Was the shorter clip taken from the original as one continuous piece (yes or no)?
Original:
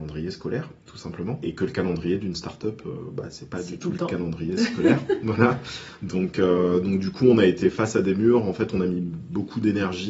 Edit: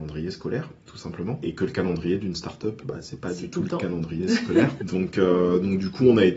no